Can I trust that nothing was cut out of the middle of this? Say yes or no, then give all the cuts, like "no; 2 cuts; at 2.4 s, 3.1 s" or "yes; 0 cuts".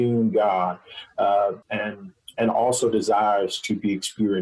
no; 1 cut; at 1.6 s